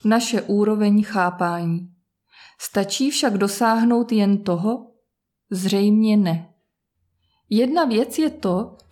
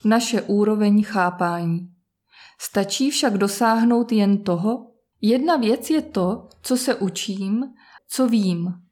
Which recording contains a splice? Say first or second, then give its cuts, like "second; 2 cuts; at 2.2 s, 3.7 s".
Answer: second; 2 cuts; at 5.1 s, 8.0 s